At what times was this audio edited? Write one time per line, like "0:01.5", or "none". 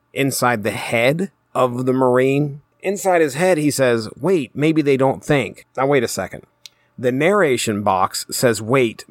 none